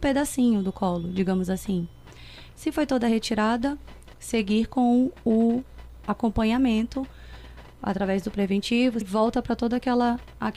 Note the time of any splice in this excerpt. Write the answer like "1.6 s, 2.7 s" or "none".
2.5 s, 4.1 s, 9.0 s